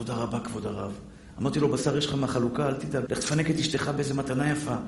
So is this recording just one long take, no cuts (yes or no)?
no